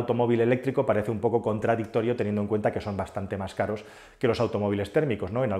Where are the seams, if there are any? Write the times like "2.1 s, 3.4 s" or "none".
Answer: none